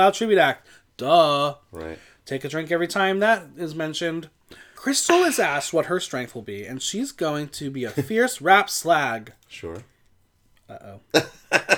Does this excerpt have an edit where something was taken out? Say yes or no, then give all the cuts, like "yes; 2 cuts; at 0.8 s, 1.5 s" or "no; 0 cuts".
yes; 1 cut; at 4.8 s